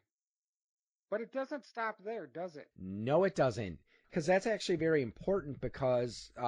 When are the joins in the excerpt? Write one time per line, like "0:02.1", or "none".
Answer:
0:02.7
0:04.0